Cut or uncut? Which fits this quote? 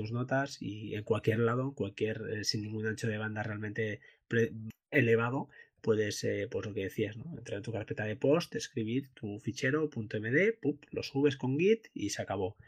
uncut